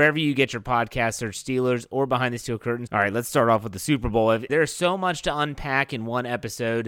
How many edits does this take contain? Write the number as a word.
two